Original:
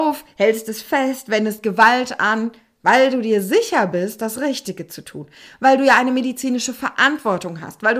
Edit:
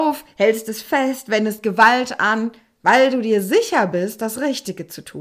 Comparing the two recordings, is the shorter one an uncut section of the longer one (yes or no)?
yes